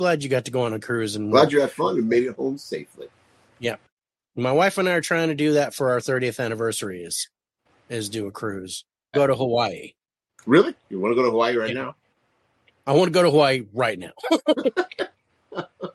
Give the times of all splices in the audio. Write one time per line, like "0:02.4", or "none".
0:09.1